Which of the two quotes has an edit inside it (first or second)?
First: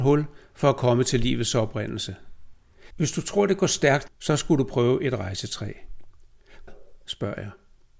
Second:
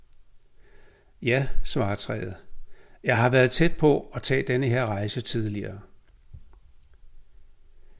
first